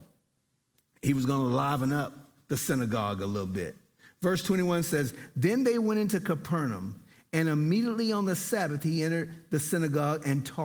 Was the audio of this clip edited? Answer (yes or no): no